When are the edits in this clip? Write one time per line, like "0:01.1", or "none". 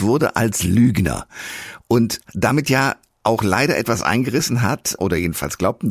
0:02.2
0:05.0